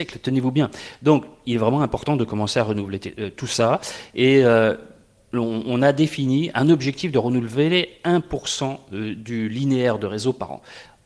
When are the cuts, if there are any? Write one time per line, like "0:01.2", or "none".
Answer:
none